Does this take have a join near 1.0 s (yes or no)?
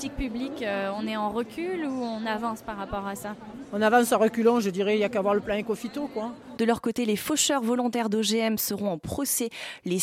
no